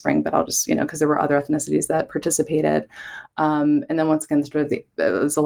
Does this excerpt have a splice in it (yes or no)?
no